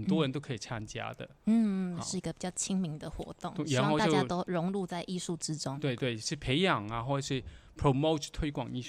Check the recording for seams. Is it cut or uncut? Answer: uncut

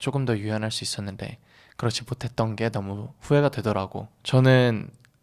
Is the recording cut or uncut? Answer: cut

